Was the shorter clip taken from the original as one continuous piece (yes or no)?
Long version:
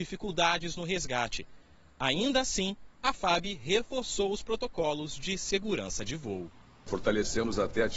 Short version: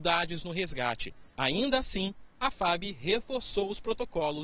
no